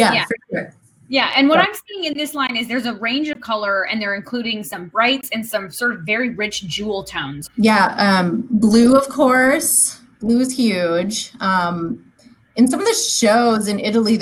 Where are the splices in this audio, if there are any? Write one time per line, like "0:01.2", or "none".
0:07.5